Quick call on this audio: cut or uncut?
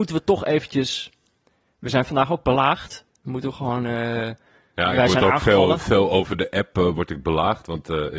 uncut